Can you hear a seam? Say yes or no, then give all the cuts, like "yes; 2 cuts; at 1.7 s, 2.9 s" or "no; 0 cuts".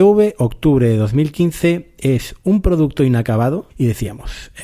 yes; 1 cut; at 3.7 s